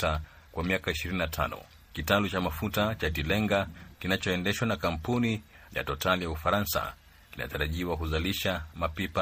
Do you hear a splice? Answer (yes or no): no